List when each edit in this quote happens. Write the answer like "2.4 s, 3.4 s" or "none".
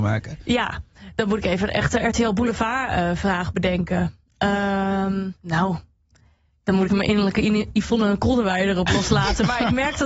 5.4 s, 6.9 s